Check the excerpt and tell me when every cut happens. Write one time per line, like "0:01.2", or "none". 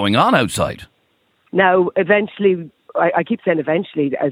0:01.5